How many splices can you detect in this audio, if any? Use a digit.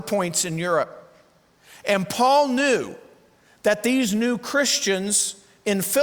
0